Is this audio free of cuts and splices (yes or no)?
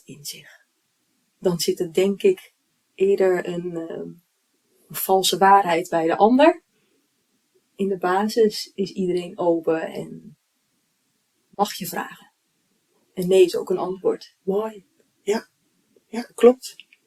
yes